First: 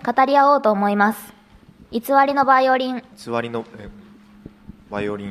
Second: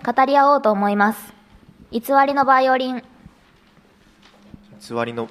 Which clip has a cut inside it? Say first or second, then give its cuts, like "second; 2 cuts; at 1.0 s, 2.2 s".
first; 1 cut; at 3.1 s